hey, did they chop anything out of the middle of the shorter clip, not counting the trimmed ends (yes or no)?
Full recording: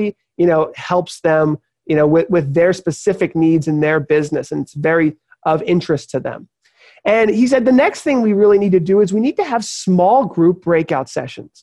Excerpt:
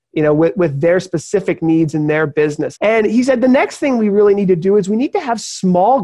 yes